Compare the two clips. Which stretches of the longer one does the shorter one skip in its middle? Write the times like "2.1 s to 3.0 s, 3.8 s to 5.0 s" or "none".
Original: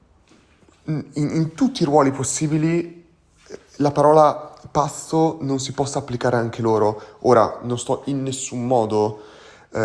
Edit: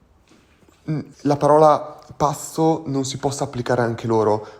1.1 s to 3.7 s